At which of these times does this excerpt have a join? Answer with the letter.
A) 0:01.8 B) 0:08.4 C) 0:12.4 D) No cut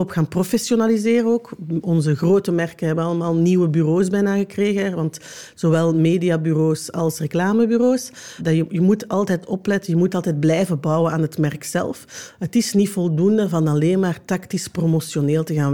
B